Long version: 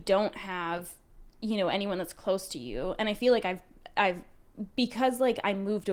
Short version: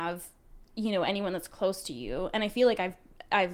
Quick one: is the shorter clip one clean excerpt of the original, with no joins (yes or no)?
yes